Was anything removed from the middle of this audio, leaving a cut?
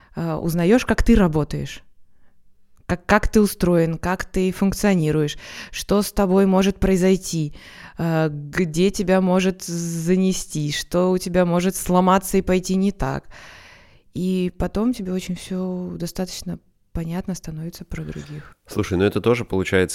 no; 0 cuts

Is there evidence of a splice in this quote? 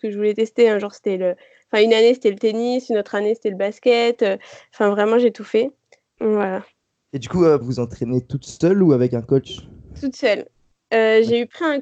yes; 2 cuts; at 6.2 s, 7.6 s

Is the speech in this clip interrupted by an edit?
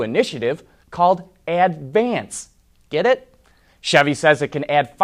yes; 1 cut; at 3.7 s

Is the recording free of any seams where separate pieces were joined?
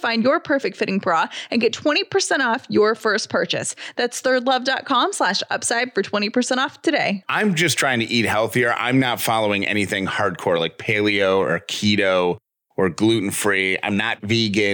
yes; 0 cuts

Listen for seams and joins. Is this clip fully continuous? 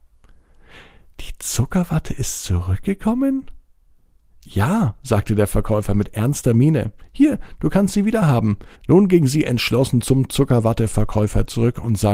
no; 1 cut; at 8.7 s

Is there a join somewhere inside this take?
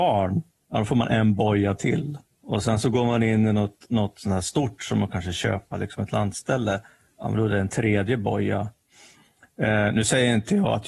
yes; 1 cut; at 2.2 s

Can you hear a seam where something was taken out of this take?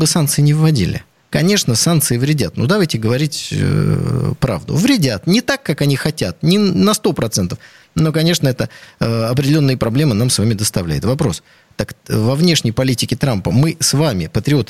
no; 0 cuts

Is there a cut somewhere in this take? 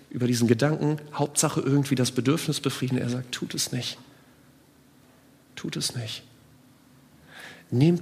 no; 0 cuts

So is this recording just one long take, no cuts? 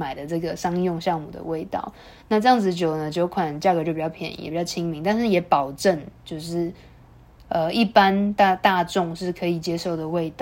yes; 0 cuts

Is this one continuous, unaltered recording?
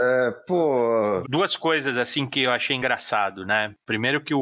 no; 1 cut; at 1.2 s

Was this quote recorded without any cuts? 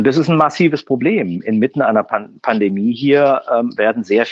yes; 0 cuts

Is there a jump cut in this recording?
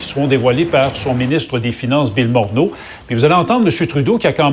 no; 0 cuts

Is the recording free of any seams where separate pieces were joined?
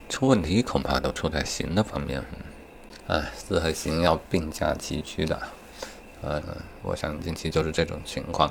no; 1 cut; at 6.4 s

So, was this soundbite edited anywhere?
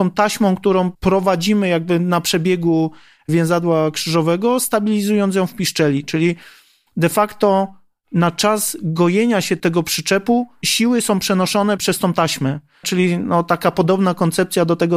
yes; 1 cut; at 12.8 s

